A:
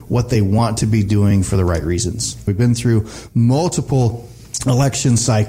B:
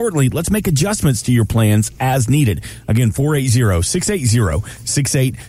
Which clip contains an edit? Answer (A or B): A